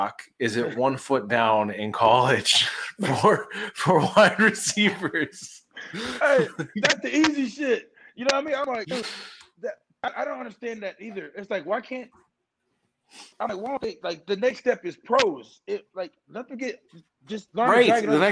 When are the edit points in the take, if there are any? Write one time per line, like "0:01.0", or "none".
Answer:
0:13.3